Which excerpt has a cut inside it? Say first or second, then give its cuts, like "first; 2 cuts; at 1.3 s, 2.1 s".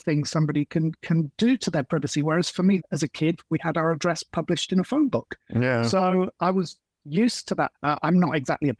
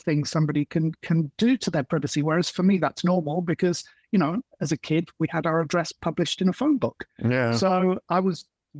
first; 2 cuts; at 2.8 s, 7.7 s